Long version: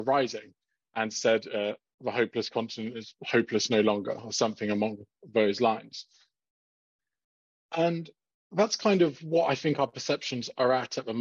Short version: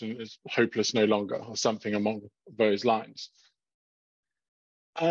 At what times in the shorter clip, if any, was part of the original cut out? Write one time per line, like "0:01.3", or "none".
none